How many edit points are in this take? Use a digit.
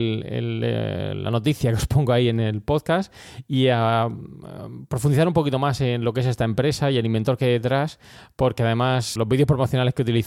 1